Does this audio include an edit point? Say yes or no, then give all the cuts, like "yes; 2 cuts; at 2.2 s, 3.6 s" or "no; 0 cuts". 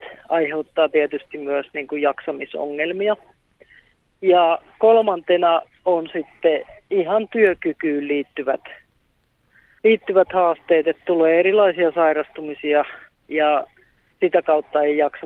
no; 0 cuts